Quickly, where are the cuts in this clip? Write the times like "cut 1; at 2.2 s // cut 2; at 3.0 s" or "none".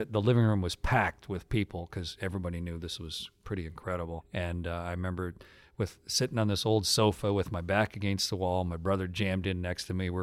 none